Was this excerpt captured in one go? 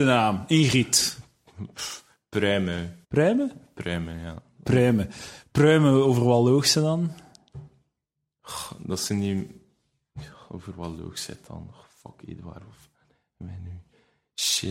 no; 1 cut; at 3.0 s

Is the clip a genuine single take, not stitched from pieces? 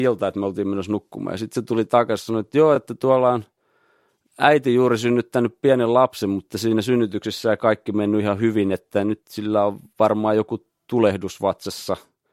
yes; 0 cuts

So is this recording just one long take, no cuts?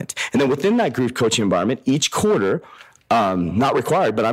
yes; 0 cuts

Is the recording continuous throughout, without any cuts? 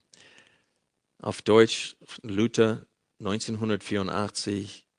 yes; 0 cuts

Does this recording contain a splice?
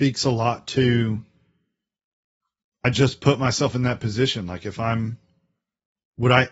no; 0 cuts

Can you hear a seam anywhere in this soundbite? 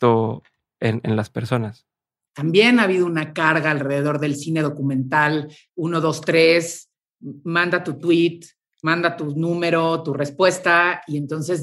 yes; 2 cuts; at 2.3 s, 5.7 s

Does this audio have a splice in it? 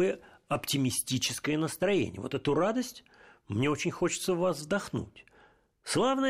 no; 0 cuts

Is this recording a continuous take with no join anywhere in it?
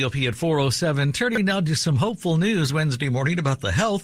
yes; 0 cuts

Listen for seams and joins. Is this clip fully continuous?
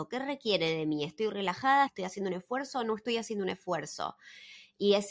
no; 1 cut; at 1.9 s

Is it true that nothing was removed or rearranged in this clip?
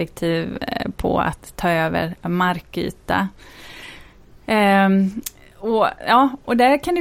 yes; 0 cuts

